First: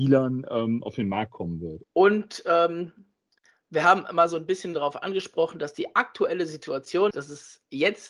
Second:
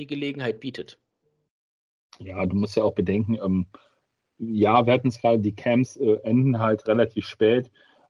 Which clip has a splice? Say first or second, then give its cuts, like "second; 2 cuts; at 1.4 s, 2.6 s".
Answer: first; 2 cuts; at 1.8 s, 7.1 s